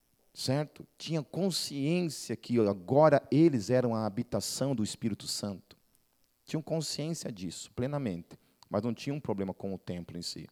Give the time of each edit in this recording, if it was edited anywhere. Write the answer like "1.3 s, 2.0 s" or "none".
none